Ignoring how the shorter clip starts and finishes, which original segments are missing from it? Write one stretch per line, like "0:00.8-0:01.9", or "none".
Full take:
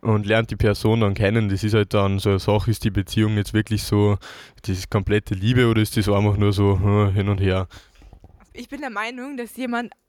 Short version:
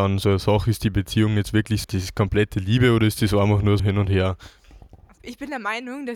0:03.8-0:04.6
0:06.5-0:07.1